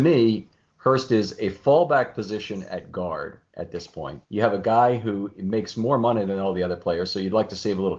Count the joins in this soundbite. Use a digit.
1